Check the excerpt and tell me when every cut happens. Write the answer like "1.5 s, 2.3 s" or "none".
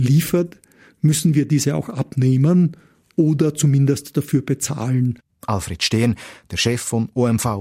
5.3 s